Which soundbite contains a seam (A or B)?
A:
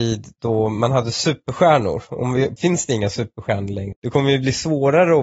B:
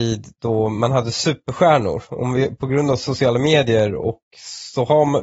A